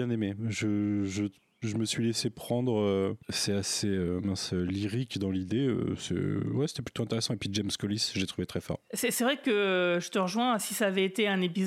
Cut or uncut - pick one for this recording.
uncut